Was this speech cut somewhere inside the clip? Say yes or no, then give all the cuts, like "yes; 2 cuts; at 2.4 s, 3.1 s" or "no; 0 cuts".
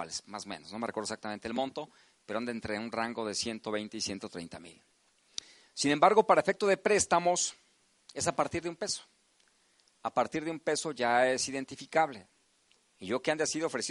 yes; 1 cut; at 12.8 s